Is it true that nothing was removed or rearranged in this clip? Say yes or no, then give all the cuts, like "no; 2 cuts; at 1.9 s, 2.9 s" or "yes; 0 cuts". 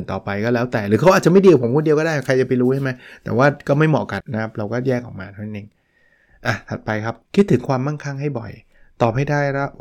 no; 2 cuts; at 4.2 s, 7.3 s